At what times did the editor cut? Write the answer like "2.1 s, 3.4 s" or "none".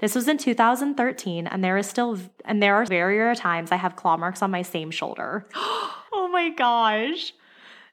2.9 s, 6.1 s